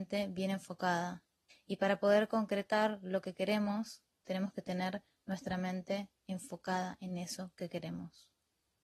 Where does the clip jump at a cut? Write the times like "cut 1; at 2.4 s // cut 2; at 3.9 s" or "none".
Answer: cut 1; at 1.5 s